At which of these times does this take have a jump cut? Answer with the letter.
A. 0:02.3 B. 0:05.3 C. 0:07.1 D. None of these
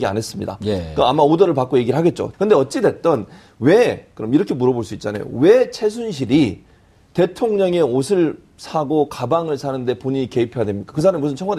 A